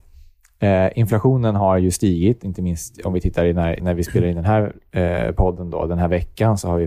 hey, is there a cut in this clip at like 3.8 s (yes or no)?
yes